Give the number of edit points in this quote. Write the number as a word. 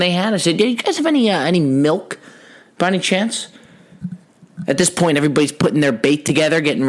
zero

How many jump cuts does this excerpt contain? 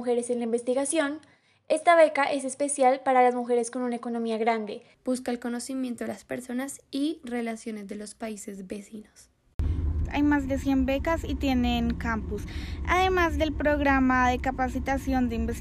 two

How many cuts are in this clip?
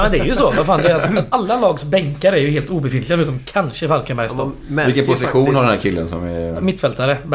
zero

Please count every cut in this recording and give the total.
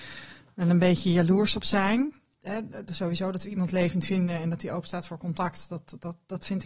zero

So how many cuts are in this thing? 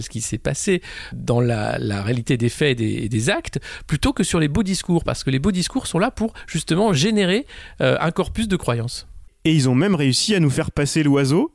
one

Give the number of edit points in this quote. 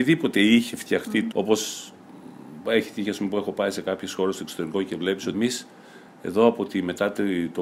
two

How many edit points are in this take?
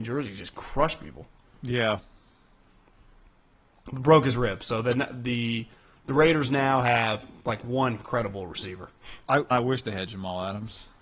one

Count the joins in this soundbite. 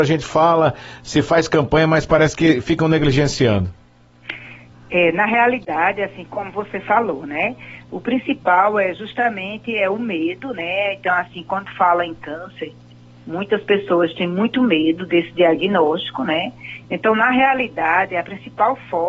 one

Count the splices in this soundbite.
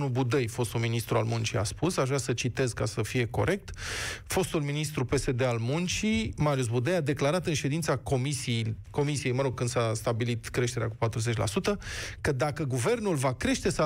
zero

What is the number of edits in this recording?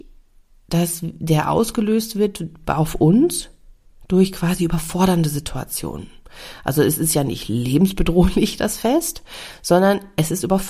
zero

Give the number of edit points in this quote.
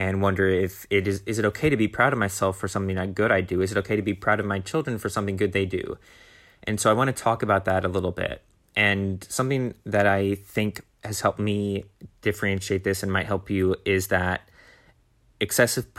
zero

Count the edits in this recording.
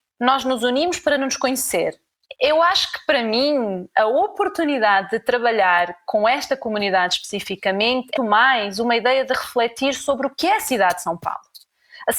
two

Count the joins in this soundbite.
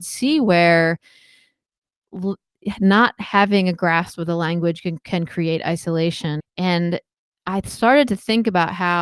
one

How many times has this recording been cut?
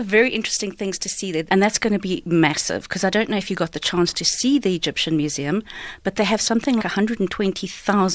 two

